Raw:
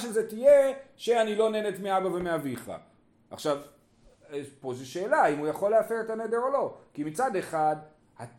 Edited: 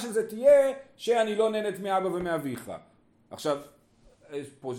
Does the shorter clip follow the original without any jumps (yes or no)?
yes